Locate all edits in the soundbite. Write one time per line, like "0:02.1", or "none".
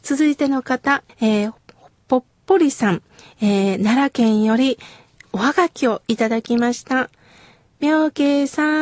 none

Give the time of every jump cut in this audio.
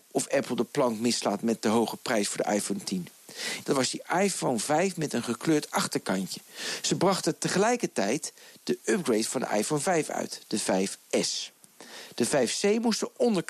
0:03.6

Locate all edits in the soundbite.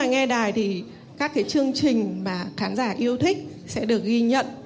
0:01.1

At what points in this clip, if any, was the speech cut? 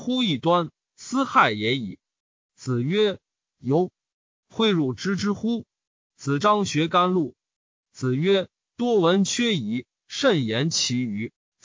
0:06.0

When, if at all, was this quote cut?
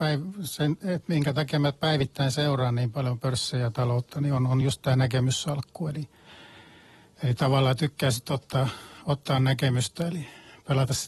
none

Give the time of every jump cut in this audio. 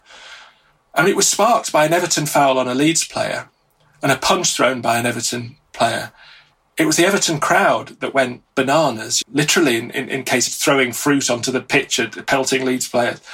0:09.2
0:10.5

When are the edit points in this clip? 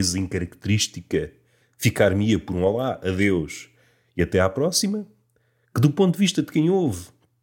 0:01.6

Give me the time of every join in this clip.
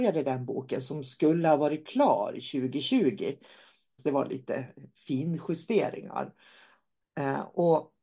0:04.0

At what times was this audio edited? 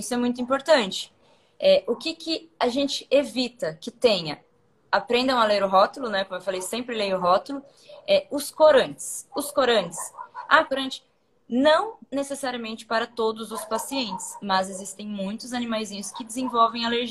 0:10.7

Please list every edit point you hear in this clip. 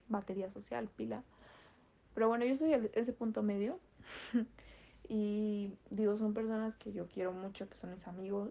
0:02.1

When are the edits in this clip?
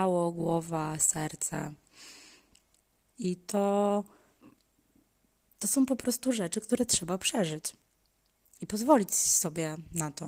0:03.1

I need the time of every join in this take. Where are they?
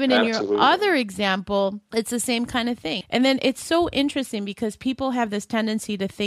0:03.0

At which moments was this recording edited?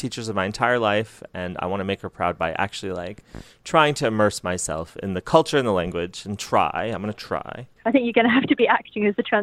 none

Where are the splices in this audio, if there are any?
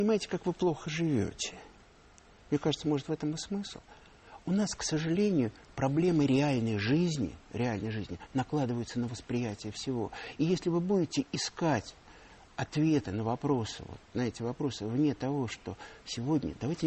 none

